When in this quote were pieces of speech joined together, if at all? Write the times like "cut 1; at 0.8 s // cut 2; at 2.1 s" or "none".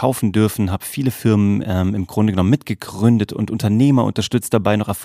none

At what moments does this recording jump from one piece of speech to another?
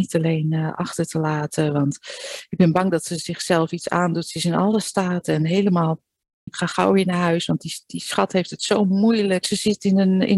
cut 1; at 6.5 s // cut 2; at 9.4 s

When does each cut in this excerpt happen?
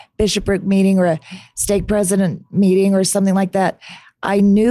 none

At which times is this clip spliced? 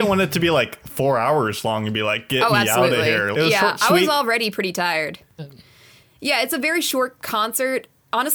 cut 1; at 3.3 s // cut 2; at 5.4 s

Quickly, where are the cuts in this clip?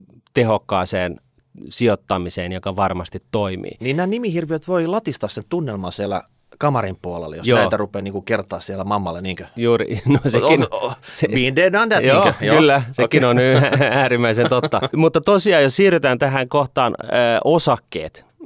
cut 1; at 14.9 s

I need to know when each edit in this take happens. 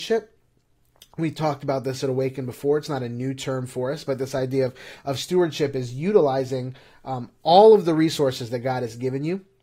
none

